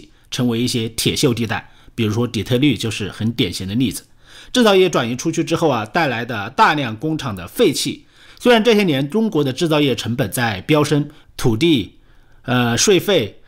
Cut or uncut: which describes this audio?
cut